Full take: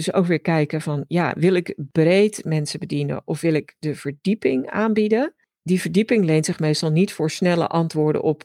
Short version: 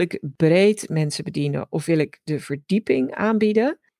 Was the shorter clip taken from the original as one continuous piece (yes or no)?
yes